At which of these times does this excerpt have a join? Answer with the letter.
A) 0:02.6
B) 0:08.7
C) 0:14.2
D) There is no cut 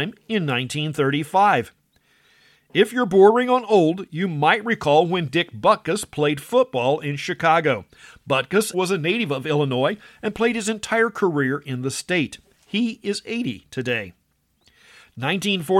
B